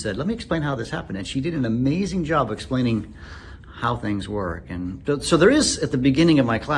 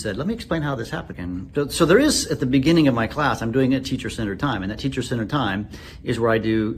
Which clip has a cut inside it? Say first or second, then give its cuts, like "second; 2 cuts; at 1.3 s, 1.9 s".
second; 1 cut; at 1.1 s